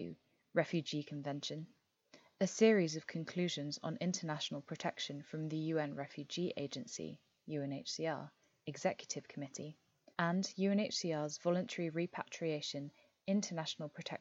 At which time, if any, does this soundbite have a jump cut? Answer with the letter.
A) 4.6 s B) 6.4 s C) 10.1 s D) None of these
C